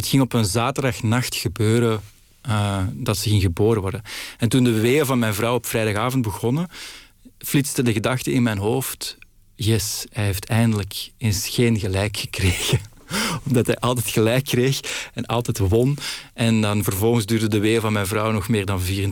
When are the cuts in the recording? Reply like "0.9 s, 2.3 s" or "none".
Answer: 7.3 s